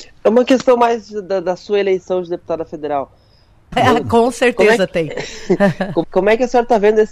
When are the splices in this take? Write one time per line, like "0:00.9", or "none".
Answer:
0:03.7
0:06.0